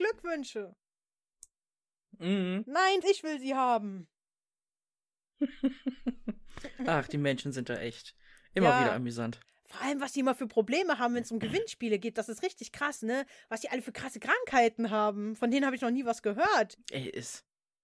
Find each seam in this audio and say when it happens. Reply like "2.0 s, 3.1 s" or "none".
3.0 s